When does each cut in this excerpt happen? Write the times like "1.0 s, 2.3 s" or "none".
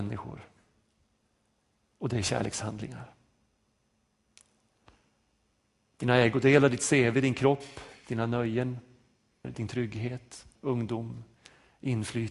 9.4 s, 10.6 s